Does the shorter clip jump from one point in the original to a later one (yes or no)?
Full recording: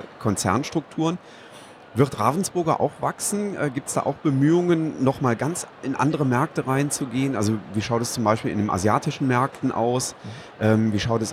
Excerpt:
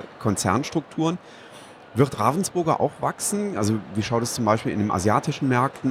yes